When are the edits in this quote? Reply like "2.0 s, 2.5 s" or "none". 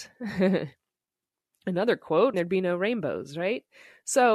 2.3 s